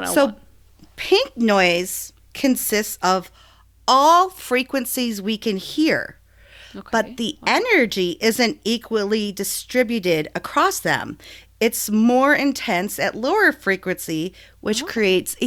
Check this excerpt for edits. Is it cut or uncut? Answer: uncut